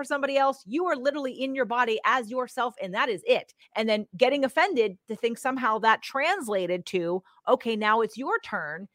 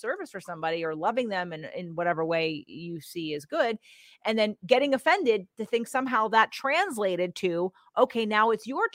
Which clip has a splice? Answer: first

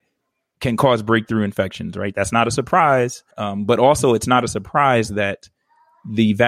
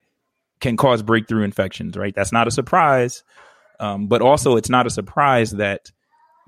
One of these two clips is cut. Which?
first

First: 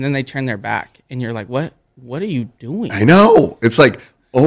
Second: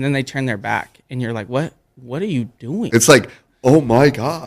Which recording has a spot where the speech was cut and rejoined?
second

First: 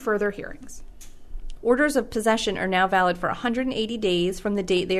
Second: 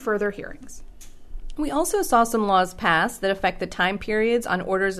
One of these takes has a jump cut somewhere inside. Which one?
first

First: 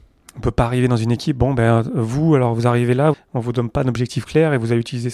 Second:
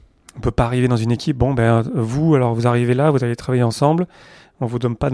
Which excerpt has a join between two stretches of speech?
first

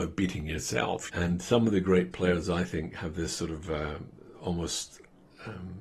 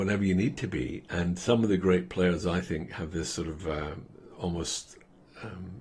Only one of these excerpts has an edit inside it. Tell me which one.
first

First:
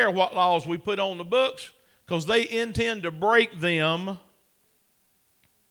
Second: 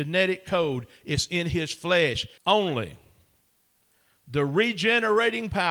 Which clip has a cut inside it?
second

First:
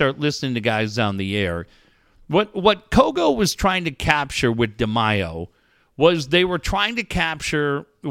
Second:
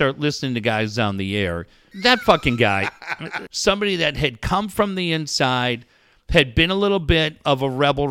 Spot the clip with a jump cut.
second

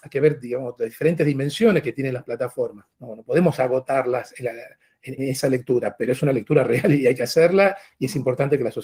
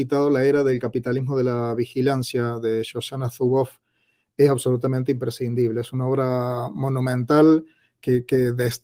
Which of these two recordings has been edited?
first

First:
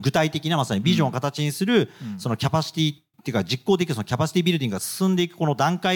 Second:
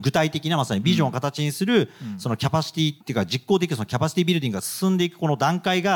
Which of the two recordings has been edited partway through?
second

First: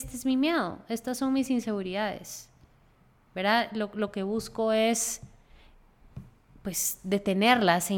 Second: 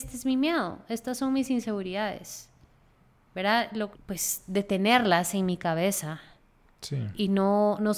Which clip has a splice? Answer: second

